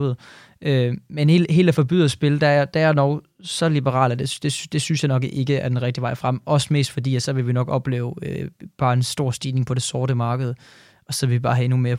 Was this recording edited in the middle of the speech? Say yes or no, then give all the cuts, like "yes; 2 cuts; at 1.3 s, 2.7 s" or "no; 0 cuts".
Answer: no; 0 cuts